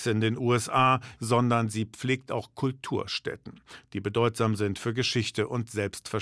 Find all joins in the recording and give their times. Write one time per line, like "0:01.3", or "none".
0:01.2